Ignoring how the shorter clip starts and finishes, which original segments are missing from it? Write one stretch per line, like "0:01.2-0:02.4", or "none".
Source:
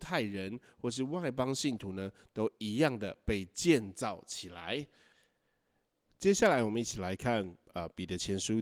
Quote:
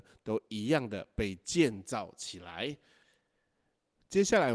none